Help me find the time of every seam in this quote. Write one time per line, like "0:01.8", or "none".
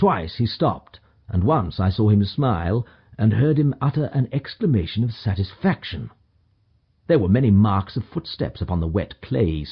none